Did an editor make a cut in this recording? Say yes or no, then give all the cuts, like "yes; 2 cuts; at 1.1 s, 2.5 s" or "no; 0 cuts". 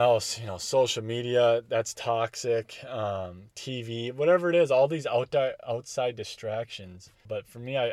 no; 0 cuts